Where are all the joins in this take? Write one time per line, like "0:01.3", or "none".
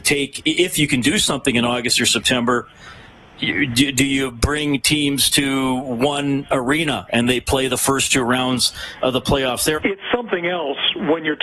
0:09.8